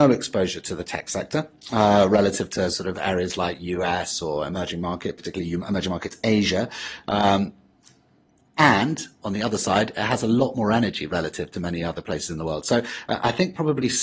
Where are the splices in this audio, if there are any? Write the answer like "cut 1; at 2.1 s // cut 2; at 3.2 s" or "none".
none